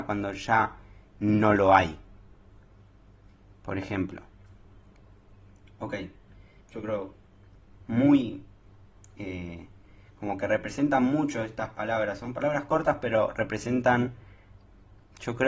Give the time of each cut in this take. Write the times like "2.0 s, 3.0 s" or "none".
6.6 s